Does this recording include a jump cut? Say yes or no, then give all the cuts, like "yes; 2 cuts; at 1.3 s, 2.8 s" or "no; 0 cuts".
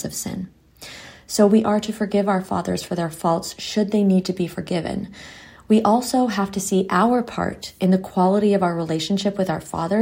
no; 0 cuts